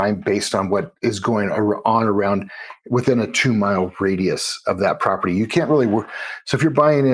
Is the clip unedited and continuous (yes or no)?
yes